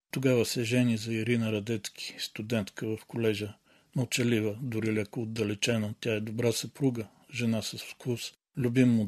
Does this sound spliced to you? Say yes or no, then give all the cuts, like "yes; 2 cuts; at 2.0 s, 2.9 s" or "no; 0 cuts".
no; 0 cuts